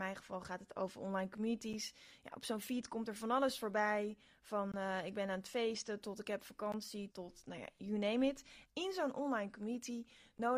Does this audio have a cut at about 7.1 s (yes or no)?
yes